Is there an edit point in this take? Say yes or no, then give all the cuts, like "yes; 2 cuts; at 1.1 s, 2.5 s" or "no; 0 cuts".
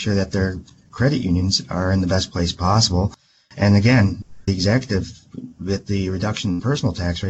no; 0 cuts